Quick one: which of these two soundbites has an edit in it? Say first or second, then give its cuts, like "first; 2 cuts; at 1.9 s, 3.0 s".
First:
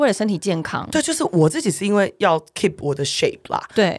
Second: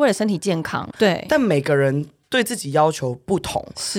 second; 1 cut; at 0.9 s